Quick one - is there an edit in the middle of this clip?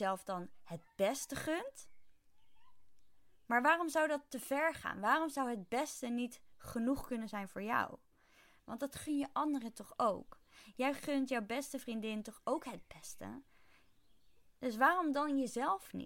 yes; 1 cut; at 8.6 s

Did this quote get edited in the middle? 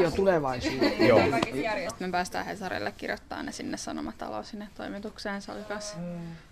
yes; 1 cut; at 1.9 s

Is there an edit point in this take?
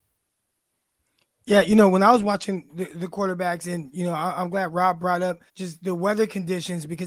yes; 1 cut; at 5.5 s

